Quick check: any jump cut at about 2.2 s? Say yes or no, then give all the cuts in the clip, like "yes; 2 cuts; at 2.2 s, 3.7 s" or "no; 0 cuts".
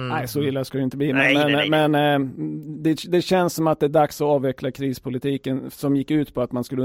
no; 0 cuts